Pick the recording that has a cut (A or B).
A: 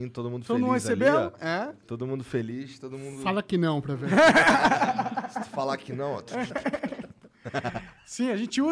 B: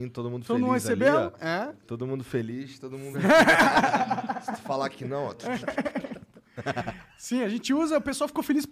B